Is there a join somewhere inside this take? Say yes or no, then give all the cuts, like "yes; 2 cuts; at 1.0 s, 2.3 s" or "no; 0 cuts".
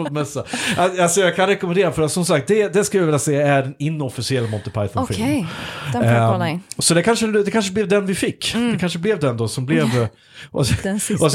no; 0 cuts